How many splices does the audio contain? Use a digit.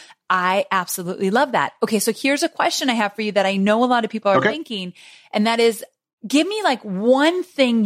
0